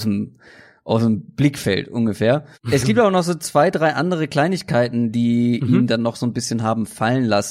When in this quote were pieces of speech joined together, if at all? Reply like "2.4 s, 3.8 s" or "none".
2.5 s